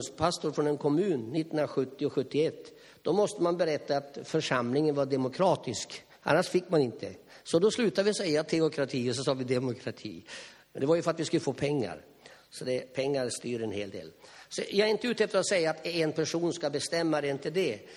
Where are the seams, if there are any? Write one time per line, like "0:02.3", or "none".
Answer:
none